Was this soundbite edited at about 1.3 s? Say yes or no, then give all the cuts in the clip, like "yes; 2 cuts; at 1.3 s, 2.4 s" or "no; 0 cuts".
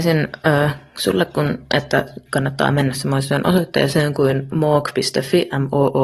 no; 0 cuts